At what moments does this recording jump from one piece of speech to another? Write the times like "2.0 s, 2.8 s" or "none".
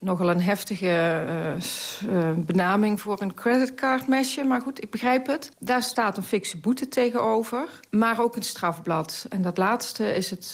none